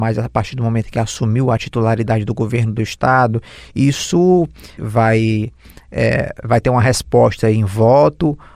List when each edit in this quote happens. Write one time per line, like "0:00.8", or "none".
0:04.8